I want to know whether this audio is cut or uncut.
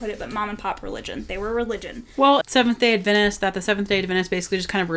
cut